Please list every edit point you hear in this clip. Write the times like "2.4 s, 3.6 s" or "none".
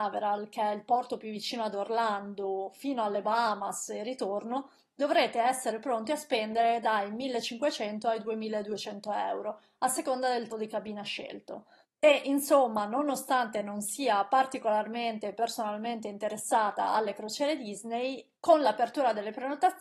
10.5 s, 11.8 s, 18.3 s